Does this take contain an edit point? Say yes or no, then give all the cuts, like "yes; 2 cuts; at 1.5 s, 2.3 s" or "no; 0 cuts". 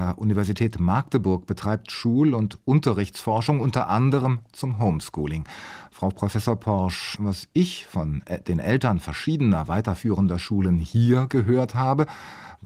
yes; 1 cut; at 7.1 s